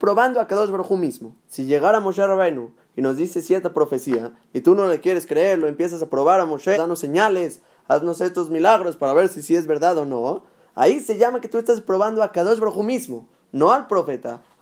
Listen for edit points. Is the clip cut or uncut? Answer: cut